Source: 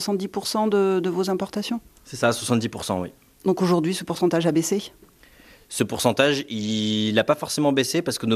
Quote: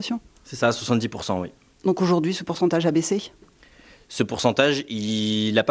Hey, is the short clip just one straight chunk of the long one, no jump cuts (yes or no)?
yes